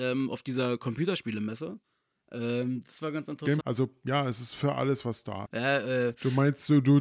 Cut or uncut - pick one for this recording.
cut